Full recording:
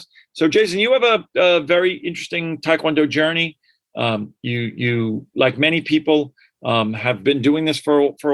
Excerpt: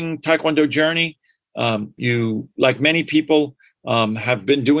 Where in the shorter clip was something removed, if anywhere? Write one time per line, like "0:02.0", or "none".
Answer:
0:02.0

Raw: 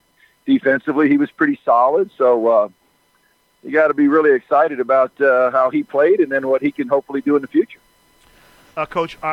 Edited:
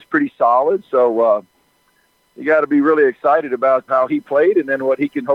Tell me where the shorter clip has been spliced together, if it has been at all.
0:03.9

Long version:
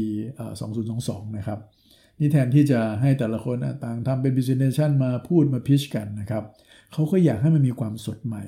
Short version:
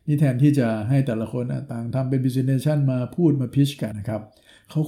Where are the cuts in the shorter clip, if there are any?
0:03.9

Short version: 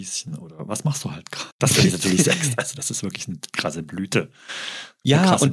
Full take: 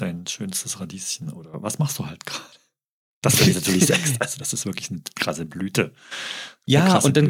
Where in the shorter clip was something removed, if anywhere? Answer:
0:01.5

